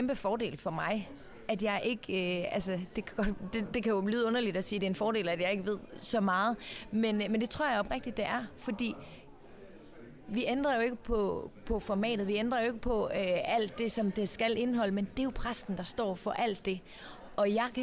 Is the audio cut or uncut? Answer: uncut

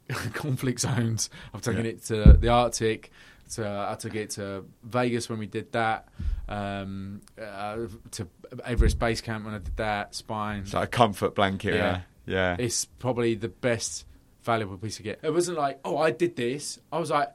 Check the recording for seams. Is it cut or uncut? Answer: cut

